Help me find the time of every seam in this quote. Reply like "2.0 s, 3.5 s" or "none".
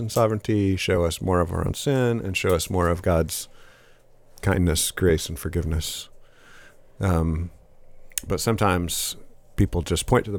none